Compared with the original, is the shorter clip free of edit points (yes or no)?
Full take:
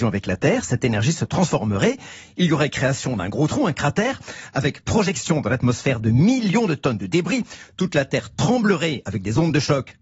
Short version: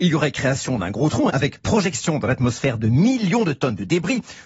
no